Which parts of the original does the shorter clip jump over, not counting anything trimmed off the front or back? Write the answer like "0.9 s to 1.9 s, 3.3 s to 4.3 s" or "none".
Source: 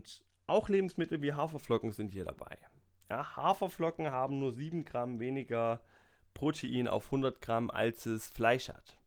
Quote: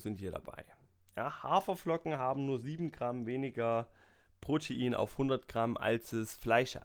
none